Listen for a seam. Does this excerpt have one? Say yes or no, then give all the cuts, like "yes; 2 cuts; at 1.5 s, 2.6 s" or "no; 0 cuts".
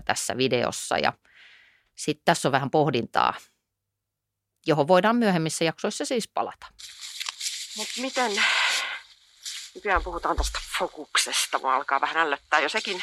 no; 0 cuts